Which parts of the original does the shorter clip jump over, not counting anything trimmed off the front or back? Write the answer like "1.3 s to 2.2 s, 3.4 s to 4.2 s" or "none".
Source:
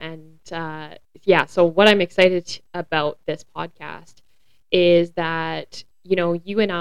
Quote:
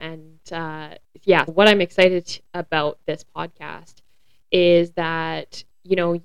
1.5 s to 1.7 s